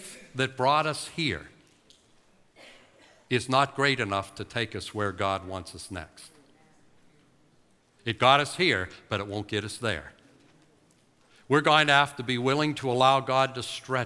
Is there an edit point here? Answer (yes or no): no